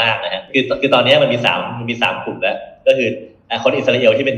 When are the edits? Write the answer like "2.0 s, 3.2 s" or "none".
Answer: none